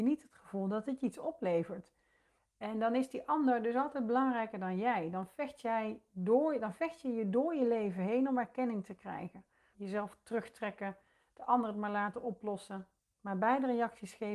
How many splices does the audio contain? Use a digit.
2